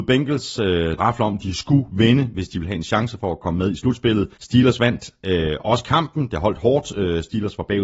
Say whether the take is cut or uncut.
cut